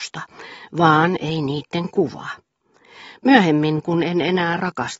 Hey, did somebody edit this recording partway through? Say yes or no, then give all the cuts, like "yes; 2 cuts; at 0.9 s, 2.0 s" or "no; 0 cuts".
no; 0 cuts